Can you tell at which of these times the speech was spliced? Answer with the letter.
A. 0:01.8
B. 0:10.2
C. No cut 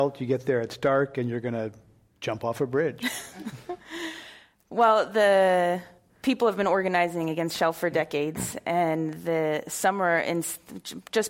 C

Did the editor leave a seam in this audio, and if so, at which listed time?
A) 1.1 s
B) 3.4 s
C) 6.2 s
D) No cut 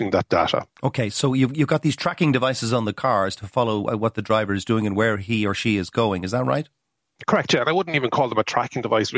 B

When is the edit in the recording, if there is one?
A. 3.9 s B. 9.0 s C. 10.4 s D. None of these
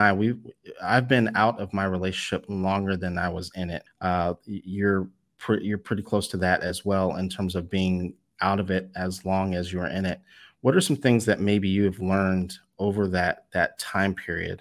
A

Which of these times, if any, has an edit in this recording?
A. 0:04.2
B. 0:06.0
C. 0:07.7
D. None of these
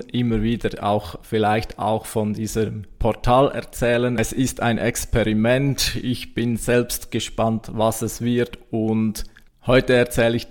D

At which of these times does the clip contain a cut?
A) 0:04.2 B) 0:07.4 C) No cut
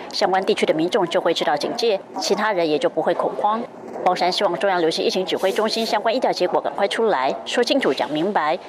A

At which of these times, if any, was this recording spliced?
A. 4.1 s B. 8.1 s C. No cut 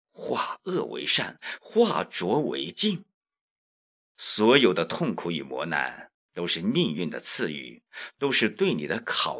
A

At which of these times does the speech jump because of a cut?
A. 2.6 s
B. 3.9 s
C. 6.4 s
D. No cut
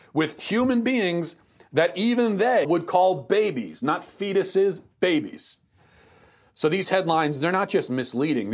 A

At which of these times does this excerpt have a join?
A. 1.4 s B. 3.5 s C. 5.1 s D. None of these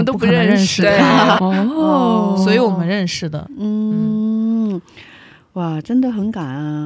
A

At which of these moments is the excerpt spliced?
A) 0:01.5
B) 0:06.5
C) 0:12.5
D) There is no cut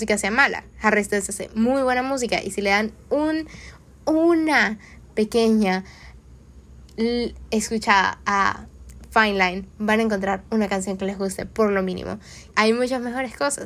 C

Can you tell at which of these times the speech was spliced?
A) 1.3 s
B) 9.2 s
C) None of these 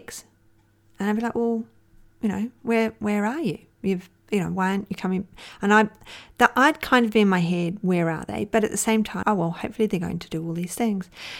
B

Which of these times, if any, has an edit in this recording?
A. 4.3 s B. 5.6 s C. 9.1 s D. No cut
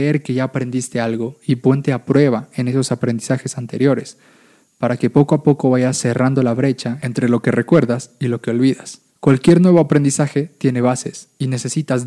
C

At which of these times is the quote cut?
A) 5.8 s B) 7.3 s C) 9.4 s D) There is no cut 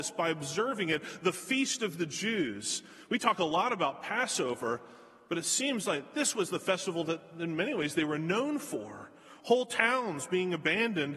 D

